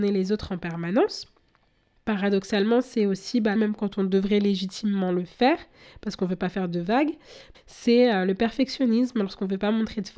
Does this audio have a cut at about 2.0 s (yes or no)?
no